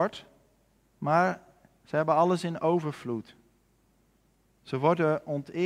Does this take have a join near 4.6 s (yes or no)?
no